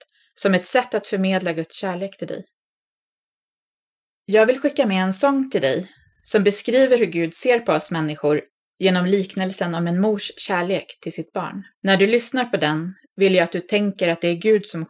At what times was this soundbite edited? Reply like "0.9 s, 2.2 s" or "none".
11.7 s